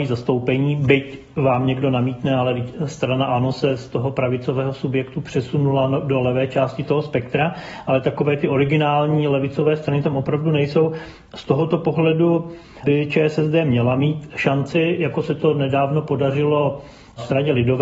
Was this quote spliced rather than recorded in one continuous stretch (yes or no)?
no